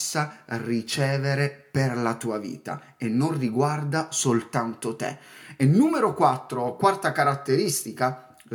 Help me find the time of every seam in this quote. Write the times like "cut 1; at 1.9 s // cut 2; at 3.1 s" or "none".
none